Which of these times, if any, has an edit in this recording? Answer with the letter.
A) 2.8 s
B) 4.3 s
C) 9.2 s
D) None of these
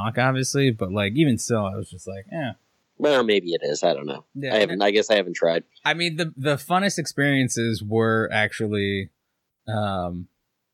A